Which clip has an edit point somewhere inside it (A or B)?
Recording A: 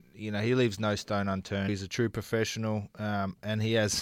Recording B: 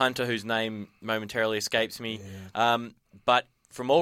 A